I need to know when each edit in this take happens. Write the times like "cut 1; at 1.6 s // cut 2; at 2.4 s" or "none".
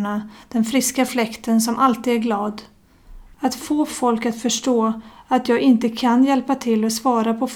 cut 1; at 3.3 s